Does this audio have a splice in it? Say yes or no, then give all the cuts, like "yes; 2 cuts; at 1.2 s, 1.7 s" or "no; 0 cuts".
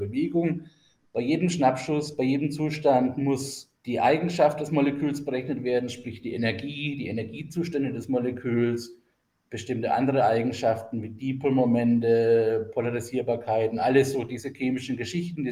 yes; 2 cuts; at 1.0 s, 3.8 s